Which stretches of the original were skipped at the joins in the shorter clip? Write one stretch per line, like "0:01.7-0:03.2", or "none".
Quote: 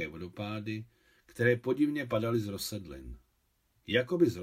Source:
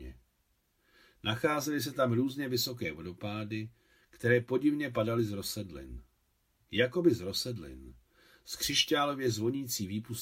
none